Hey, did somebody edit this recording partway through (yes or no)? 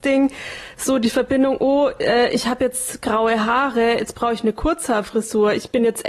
no